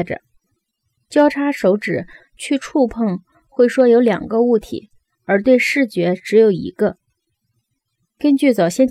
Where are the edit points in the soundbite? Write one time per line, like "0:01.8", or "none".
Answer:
0:01.0